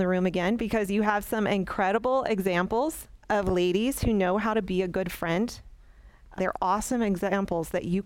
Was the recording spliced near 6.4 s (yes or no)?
yes